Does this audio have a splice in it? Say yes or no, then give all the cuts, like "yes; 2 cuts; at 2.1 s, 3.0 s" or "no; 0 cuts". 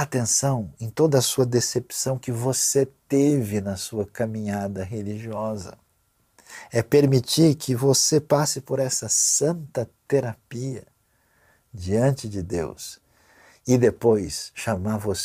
no; 0 cuts